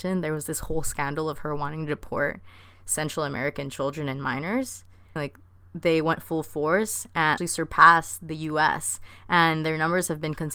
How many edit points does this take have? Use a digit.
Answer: 2